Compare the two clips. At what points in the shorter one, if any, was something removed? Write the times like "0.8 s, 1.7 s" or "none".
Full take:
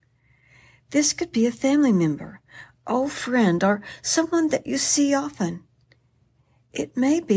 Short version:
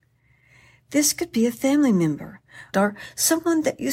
2.7 s